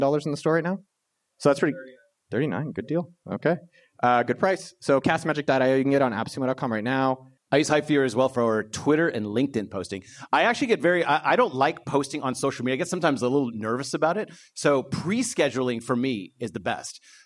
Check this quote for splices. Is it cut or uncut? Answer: cut